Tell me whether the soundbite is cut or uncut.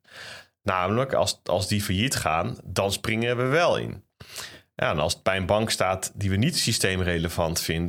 uncut